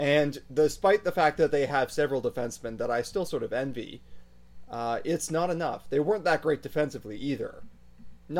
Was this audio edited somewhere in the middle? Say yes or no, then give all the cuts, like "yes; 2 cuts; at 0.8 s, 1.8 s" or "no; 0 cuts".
no; 0 cuts